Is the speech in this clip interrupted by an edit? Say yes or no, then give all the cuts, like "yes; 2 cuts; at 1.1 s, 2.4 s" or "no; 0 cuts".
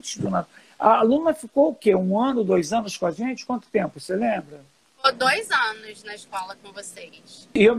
no; 0 cuts